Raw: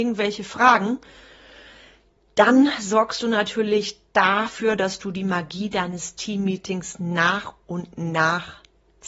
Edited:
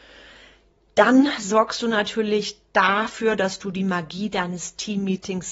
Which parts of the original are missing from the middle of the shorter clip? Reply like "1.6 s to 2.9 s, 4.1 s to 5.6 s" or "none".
none